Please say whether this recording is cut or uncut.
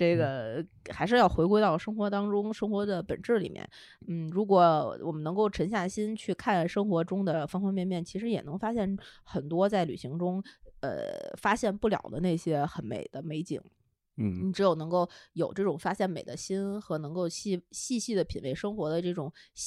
uncut